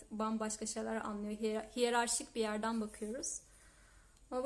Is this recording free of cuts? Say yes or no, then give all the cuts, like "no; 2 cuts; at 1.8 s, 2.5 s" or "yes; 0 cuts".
yes; 0 cuts